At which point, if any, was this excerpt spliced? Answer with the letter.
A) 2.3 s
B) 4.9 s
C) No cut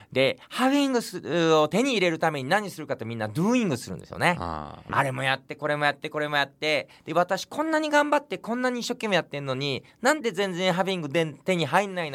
B